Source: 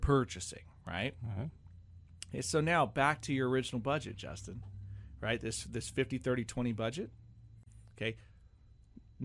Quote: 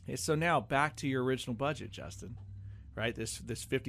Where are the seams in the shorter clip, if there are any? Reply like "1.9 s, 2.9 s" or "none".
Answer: none